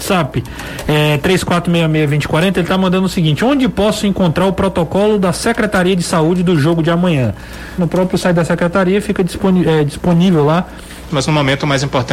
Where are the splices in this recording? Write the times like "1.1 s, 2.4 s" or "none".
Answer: 7.8 s, 11.1 s